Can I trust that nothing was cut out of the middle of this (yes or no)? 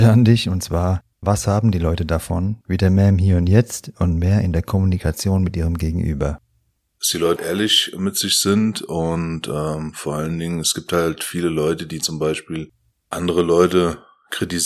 no